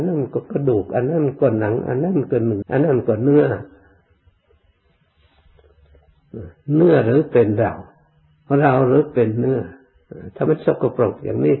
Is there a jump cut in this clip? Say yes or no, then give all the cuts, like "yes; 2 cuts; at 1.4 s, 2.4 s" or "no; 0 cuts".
yes; 2 cuts; at 2.6 s, 10.5 s